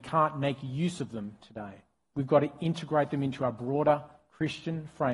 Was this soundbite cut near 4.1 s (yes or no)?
no